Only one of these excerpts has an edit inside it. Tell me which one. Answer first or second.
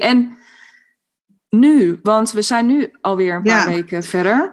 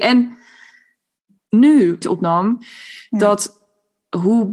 second